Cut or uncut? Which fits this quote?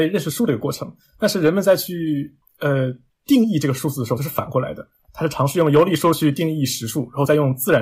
uncut